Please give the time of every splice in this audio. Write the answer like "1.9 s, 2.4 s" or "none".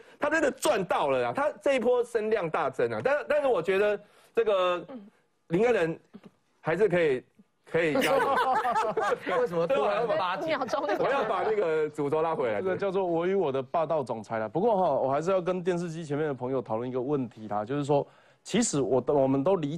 none